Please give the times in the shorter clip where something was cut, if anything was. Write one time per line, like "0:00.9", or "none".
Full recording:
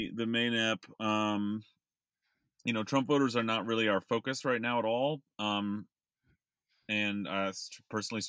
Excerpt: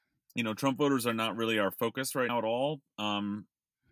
0:02.3